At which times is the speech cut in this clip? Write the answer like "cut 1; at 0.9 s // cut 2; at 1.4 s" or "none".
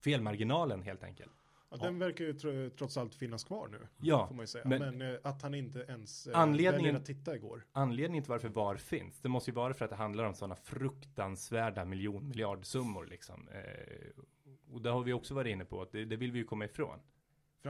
none